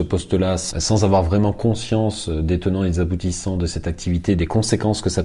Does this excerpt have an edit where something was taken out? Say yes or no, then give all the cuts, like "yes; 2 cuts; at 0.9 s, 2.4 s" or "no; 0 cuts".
no; 0 cuts